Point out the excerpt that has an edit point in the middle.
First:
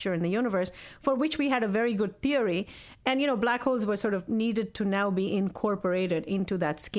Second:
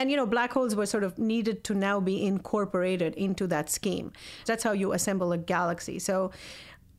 second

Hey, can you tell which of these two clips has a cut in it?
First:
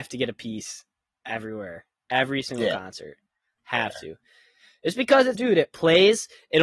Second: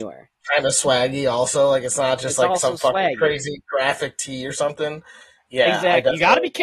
first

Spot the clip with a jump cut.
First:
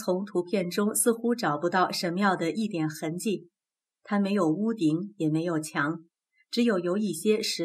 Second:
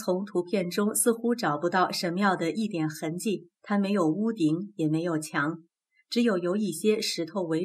second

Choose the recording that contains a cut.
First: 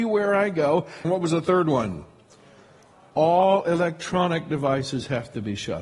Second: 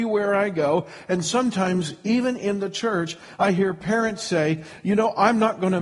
first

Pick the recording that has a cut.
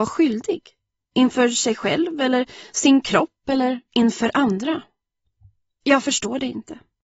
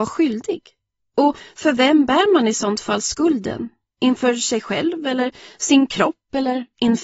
first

